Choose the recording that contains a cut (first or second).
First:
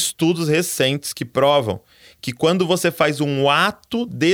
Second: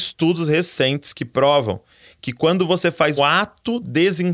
second